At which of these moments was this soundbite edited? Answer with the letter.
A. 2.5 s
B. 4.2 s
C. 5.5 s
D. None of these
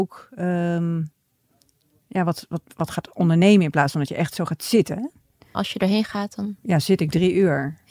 C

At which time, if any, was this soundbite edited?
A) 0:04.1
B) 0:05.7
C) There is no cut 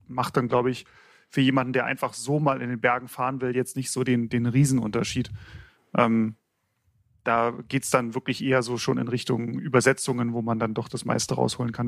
C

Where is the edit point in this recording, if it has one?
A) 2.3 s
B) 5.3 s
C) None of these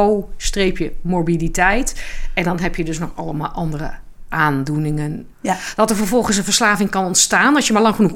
B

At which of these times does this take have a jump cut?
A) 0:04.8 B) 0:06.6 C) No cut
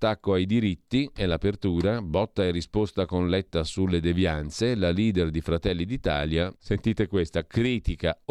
B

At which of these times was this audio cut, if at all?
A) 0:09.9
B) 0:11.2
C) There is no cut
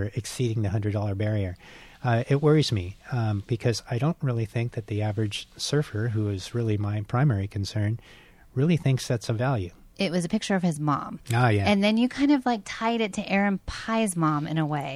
A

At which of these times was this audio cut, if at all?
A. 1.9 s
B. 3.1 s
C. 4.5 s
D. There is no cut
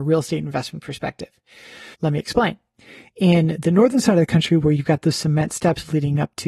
A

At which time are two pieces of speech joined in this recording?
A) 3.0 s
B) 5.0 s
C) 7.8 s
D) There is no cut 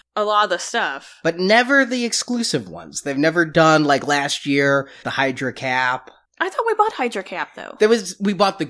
B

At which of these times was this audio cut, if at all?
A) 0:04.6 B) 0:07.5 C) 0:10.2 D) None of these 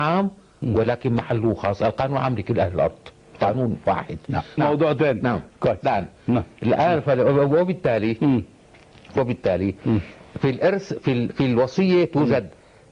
A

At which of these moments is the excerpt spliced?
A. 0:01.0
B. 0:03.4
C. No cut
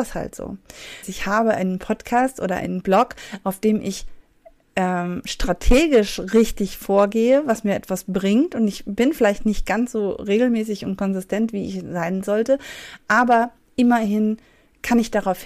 A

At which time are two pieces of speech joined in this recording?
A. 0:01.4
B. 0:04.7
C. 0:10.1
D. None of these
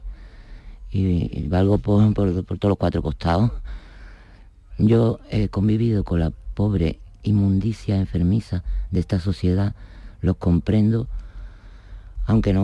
B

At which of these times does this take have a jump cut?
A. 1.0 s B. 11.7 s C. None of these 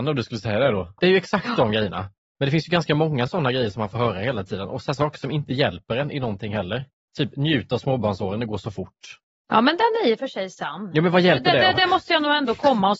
A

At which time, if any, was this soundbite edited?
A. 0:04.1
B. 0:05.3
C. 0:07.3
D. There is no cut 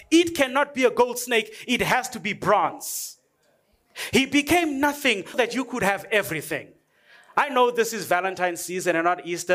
B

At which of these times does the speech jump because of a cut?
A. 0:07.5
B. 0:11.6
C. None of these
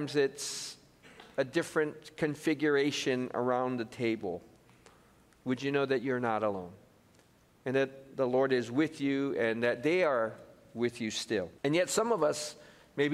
B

